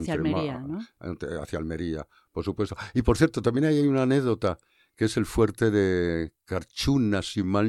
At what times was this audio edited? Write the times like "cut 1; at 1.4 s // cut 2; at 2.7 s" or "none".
none